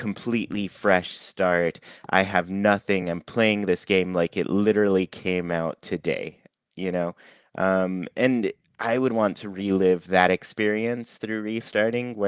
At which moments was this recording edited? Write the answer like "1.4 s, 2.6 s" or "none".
none